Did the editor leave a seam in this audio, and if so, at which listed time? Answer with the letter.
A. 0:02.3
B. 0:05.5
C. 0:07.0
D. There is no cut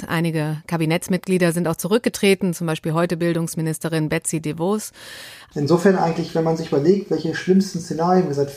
B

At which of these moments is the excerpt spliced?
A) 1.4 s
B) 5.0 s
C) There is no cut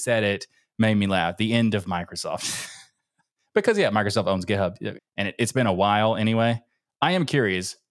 B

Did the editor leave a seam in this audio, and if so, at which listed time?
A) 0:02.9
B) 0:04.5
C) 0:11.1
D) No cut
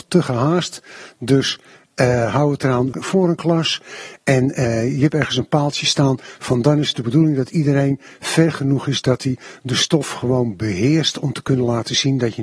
A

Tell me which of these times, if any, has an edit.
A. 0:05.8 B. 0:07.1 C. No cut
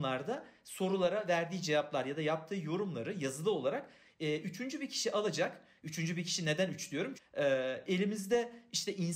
B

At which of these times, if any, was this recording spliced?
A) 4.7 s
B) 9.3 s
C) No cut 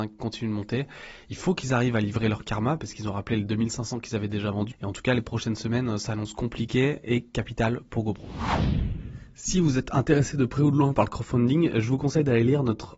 A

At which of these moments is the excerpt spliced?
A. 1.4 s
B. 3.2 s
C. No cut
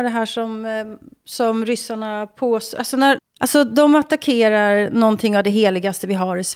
B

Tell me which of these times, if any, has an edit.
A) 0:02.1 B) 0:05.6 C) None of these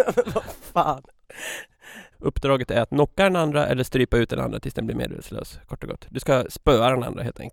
A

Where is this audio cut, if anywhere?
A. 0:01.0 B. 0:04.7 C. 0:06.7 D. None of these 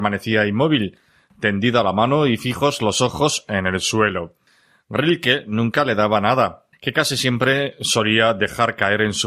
C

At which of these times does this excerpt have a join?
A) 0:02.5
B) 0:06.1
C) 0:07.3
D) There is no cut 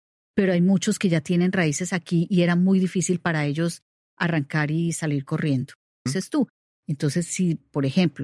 B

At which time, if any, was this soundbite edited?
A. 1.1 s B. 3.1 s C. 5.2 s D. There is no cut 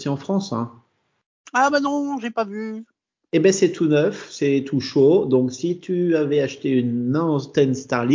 D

